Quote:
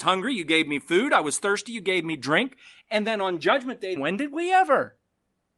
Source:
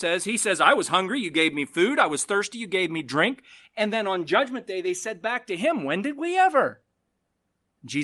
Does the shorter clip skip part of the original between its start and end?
yes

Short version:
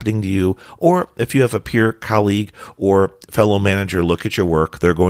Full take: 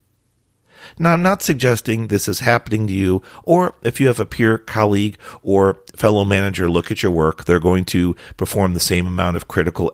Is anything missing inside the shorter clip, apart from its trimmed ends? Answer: no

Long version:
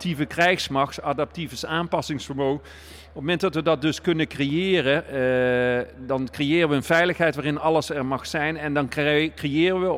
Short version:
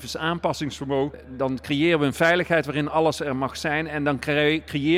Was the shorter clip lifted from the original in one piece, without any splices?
no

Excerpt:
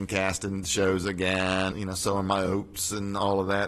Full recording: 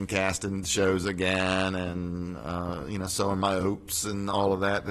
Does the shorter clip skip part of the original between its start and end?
yes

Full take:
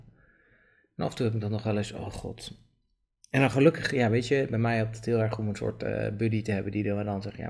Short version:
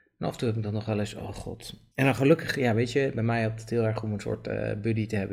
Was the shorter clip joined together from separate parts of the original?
yes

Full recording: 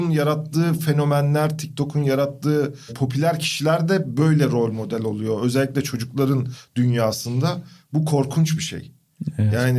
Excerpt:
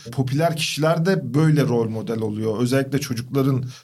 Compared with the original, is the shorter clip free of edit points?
yes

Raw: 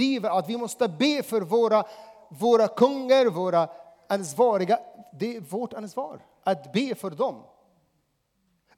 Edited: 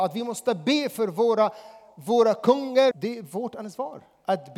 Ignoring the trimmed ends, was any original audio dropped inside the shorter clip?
yes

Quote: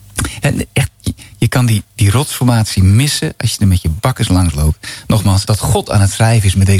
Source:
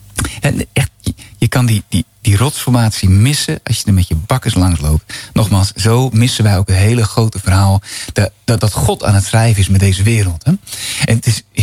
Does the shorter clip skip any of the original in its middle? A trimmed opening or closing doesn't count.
yes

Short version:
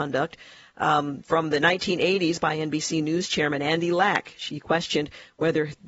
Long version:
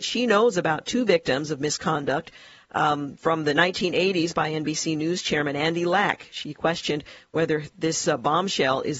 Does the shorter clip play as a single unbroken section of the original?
yes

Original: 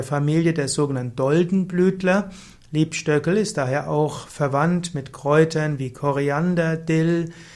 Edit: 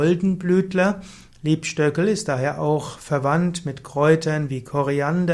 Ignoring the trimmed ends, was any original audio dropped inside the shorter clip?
no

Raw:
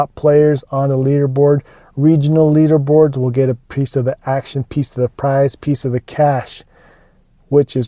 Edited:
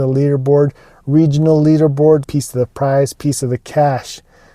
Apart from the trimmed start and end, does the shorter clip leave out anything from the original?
yes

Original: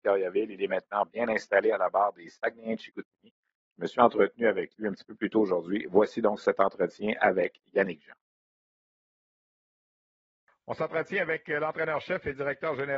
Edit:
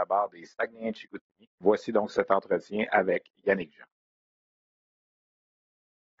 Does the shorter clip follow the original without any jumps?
no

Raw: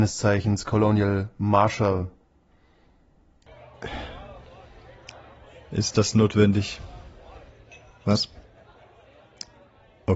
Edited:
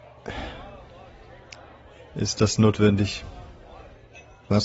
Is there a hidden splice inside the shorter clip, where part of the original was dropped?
no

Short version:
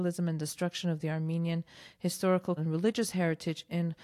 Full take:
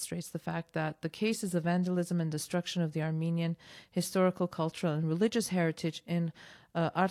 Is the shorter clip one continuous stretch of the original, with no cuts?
no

